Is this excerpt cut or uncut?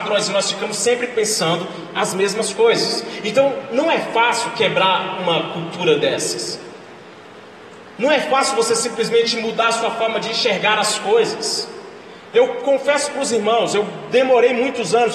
uncut